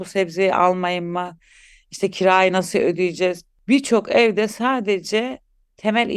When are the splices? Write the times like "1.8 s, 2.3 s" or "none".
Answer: none